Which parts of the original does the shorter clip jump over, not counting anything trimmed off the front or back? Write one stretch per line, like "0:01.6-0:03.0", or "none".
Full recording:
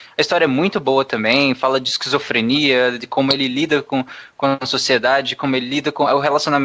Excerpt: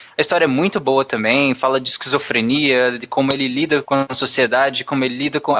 0:03.8-0:04.3